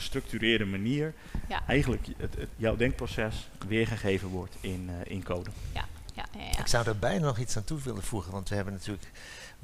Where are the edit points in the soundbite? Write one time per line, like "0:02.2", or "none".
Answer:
none

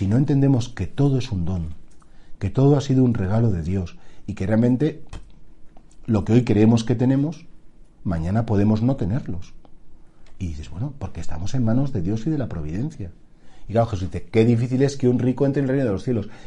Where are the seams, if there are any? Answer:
0:13.7

